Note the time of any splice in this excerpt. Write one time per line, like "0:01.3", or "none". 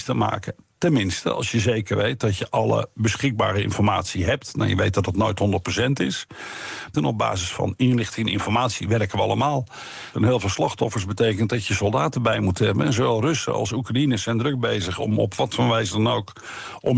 0:06.9
0:10.1